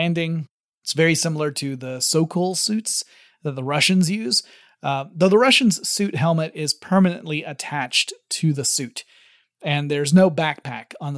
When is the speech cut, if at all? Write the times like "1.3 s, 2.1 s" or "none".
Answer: none